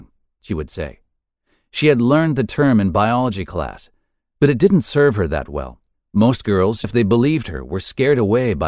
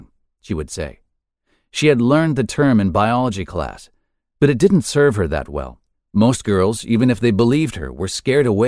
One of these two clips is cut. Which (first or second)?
first